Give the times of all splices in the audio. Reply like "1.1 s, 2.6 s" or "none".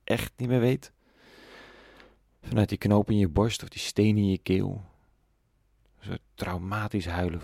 none